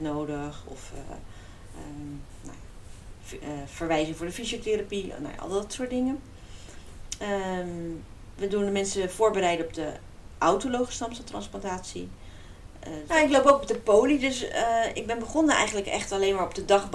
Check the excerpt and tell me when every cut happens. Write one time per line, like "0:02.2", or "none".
0:13.1